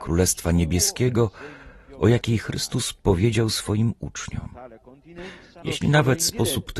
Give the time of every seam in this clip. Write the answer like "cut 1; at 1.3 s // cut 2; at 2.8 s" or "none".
cut 1; at 5.6 s